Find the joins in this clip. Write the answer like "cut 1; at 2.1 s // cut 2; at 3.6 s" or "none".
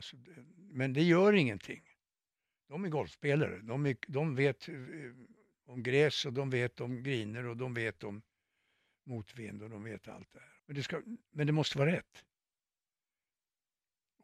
cut 1; at 10.6 s